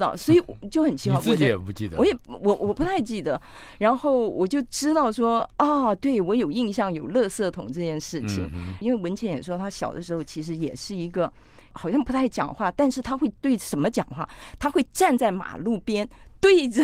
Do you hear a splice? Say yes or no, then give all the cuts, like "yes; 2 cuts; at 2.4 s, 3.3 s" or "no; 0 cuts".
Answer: yes; 1 cut; at 8.8 s